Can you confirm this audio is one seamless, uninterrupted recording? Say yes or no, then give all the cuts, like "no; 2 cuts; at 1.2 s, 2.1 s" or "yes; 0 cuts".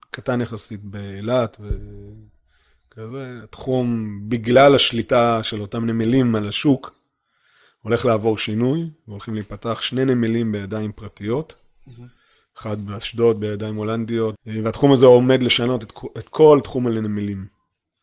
no; 1 cut; at 14.3 s